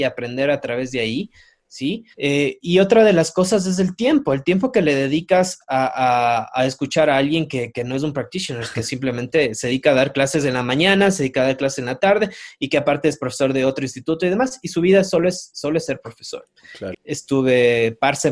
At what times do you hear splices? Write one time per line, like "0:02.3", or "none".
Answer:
0:02.1
0:16.9